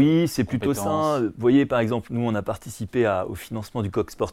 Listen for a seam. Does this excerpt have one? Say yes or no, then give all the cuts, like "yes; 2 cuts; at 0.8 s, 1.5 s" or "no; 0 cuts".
no; 0 cuts